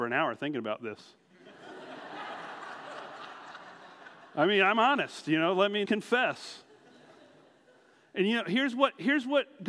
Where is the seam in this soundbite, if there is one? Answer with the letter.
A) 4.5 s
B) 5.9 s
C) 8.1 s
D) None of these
B